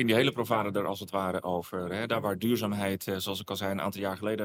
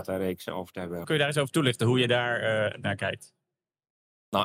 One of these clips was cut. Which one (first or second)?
second